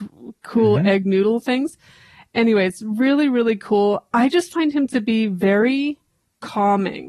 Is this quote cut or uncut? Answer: uncut